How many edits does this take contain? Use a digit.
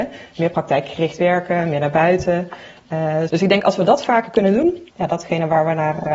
2